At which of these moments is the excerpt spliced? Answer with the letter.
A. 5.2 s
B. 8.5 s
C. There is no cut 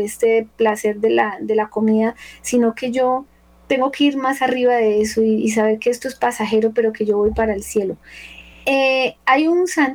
C